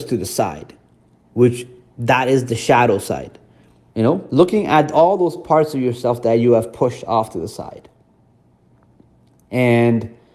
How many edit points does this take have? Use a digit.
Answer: 1